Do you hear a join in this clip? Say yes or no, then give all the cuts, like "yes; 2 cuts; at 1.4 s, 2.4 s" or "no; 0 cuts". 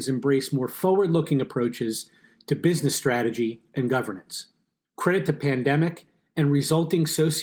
yes; 1 cut; at 4.8 s